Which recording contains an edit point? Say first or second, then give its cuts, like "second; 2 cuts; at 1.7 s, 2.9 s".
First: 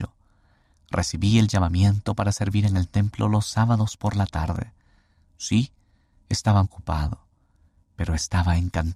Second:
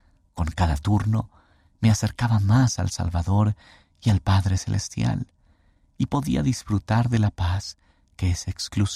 first; 1 cut; at 6.6 s